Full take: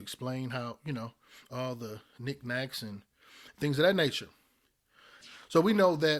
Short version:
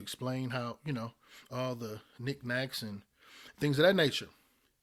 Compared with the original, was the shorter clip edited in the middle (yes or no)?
no